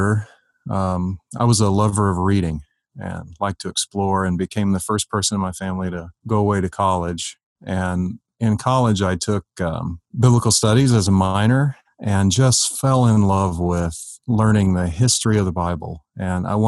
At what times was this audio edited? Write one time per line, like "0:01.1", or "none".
0:06.2
0:10.1